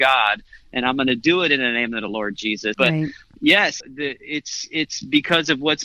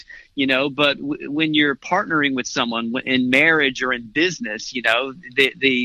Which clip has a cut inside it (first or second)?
first